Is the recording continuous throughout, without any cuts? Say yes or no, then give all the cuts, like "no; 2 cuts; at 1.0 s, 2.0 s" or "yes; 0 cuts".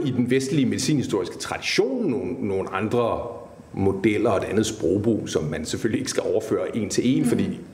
yes; 0 cuts